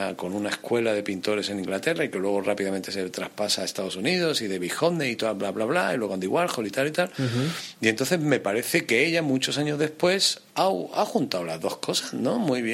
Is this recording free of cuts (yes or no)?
yes